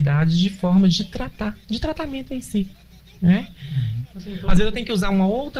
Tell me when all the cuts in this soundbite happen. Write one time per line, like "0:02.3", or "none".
0:04.0